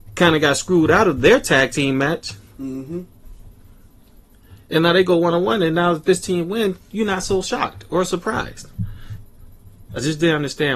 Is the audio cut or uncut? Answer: uncut